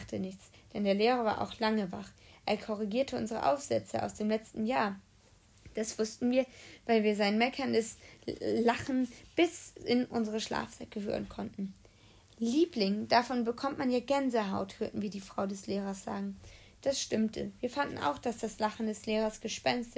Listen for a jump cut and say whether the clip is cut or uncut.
uncut